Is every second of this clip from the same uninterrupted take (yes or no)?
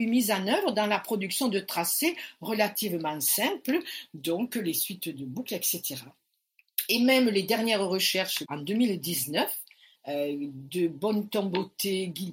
no